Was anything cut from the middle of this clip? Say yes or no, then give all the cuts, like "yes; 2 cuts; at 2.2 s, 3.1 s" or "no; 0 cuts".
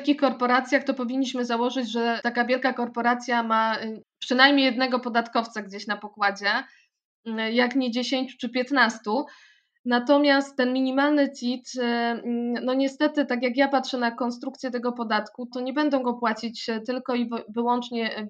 yes; 1 cut; at 15.5 s